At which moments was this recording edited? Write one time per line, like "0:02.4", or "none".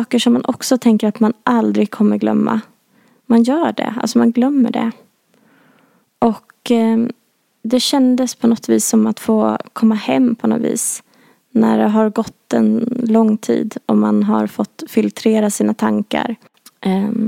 none